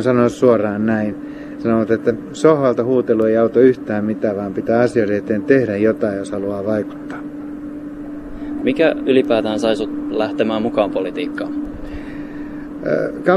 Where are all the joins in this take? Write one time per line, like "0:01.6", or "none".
0:08.6